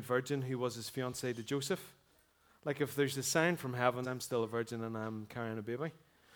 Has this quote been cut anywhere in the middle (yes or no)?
yes